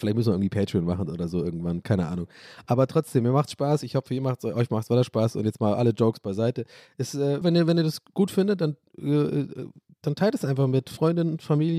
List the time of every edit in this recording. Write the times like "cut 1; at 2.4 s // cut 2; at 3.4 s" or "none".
cut 1; at 7.4 s

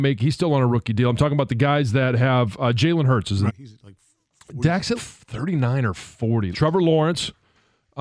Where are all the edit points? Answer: cut 1; at 3.5 s // cut 2; at 5.0 s // cut 3; at 6.5 s

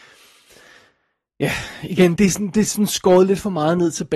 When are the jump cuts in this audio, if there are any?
cut 1; at 2.2 s

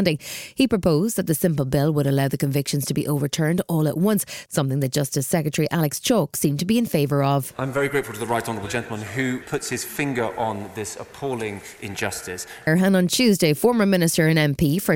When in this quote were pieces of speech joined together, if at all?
cut 1; at 9.4 s // cut 2; at 12.7 s

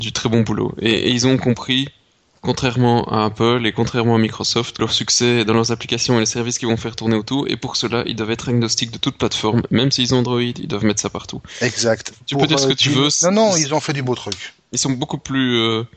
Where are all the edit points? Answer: cut 1; at 4.8 s

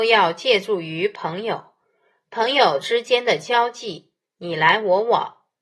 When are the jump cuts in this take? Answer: none

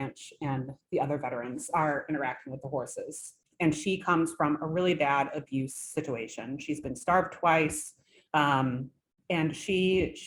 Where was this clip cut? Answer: cut 1; at 3.4 s // cut 2; at 8.3 s

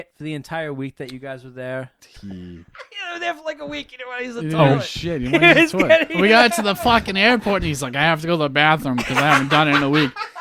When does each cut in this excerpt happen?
cut 1; at 2.0 s

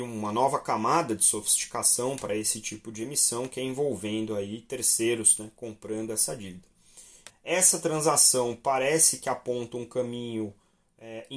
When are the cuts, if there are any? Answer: cut 1; at 7.3 s

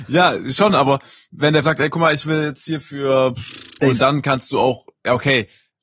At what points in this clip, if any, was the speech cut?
cut 1; at 3.8 s

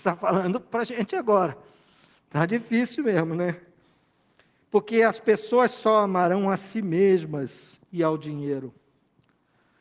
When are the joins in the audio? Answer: none

